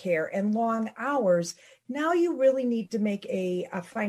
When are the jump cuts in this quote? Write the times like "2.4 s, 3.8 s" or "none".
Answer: none